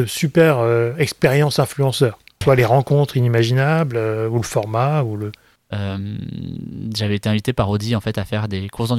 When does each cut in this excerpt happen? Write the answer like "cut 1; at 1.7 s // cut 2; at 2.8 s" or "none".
cut 1; at 2.4 s // cut 2; at 5.6 s